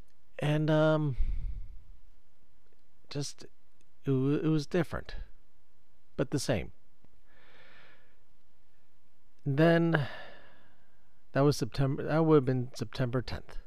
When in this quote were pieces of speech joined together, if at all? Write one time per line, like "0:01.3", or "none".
none